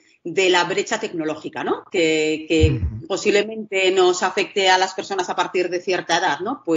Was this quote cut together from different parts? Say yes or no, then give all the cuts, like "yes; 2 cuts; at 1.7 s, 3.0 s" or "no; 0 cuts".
no; 0 cuts